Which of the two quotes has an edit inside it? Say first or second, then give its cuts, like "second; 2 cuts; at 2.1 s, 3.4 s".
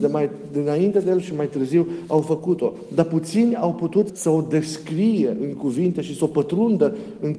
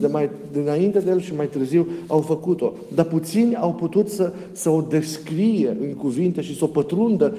first; 1 cut; at 4.1 s